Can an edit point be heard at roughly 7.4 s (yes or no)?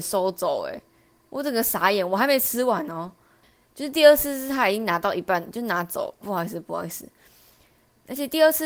no